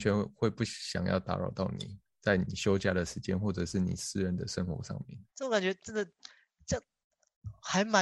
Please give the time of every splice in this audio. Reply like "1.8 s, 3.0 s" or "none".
5.3 s